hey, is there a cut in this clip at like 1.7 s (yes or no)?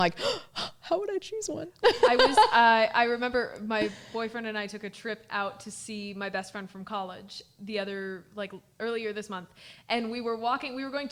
no